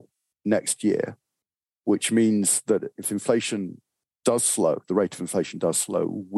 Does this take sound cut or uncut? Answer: uncut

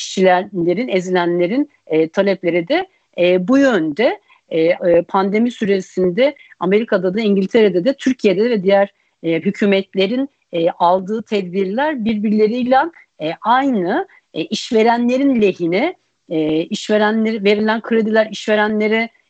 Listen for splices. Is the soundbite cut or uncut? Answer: cut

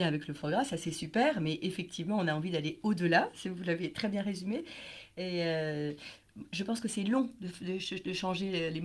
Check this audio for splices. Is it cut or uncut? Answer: uncut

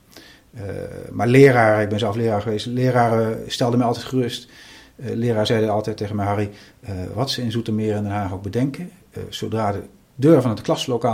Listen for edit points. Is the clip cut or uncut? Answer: uncut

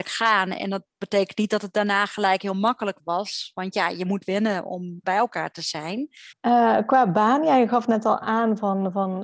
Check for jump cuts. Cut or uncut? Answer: cut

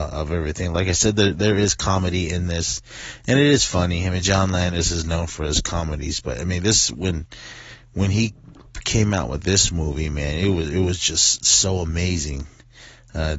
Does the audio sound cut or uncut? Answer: uncut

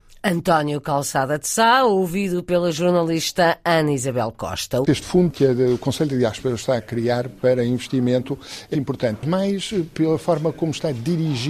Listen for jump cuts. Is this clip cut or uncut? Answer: cut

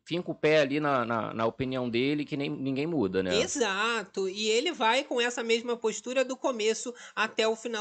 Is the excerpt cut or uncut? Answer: uncut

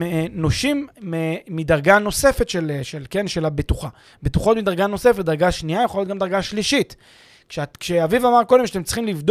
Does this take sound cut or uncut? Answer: uncut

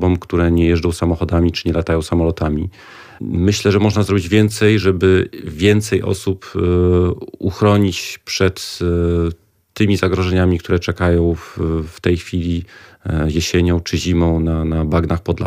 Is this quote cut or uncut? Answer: cut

